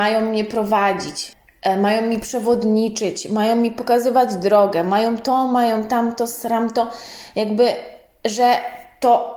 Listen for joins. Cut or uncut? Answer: uncut